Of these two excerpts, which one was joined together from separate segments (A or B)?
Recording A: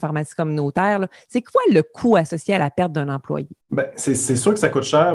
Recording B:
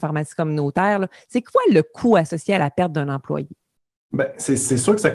A